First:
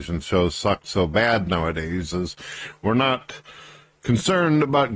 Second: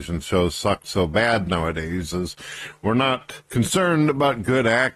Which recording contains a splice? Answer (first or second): second